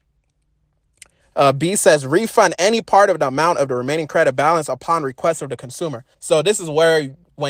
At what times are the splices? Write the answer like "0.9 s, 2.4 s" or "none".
1.2 s, 6.1 s